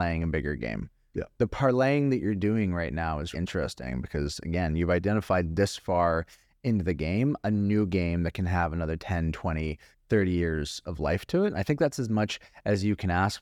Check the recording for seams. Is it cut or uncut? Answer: cut